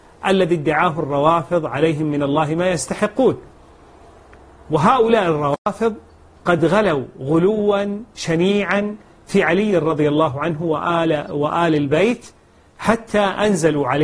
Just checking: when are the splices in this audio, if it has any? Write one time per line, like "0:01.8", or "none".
none